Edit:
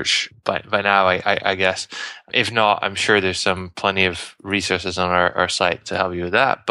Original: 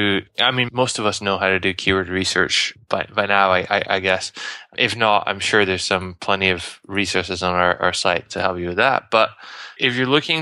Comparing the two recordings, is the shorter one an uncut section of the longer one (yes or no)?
yes